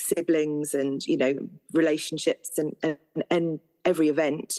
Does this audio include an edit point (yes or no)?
no